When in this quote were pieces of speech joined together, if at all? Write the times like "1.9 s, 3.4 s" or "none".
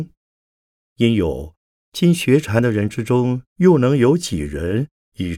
1.8 s, 3.5 s